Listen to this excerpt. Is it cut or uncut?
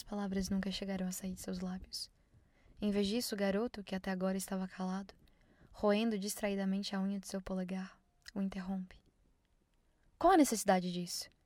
uncut